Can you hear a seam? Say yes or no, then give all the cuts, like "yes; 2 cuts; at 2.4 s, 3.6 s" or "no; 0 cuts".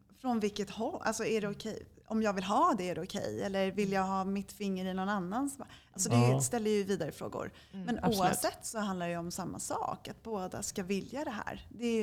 no; 0 cuts